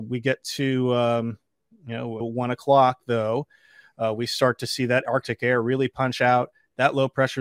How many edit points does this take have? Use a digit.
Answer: 1